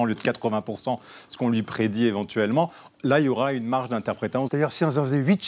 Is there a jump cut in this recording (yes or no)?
yes